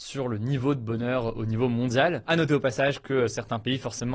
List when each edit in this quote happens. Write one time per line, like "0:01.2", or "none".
0:02.2